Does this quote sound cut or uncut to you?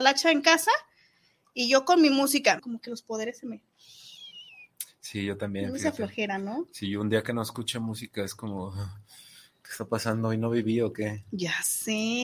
cut